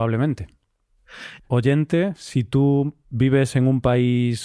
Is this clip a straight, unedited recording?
no; 1 cut; at 1.4 s

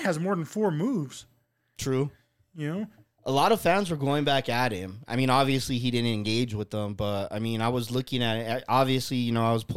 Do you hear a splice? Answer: no; 0 cuts

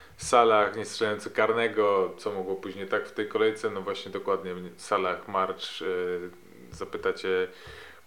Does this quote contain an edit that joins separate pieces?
no; 0 cuts

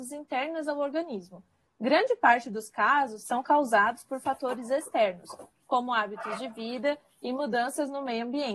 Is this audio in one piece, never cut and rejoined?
no; 2 cuts; at 1.7 s, 3.2 s

